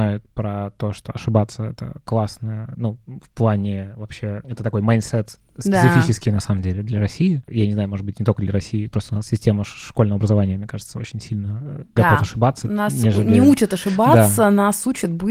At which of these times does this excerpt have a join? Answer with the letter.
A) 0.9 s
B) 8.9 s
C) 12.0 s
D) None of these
C